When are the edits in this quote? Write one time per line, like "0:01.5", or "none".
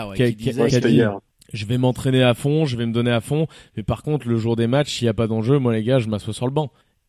none

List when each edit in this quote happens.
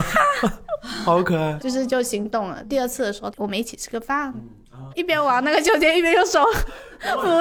0:01.6
0:03.3
0:04.9

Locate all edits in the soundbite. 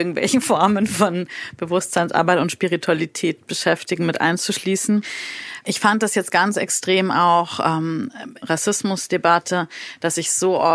0:08.4

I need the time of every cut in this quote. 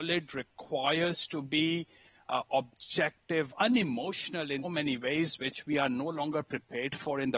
0:03.5
0:04.6

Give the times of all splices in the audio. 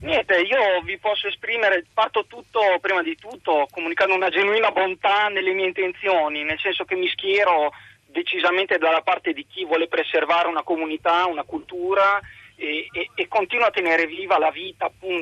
0:01.8

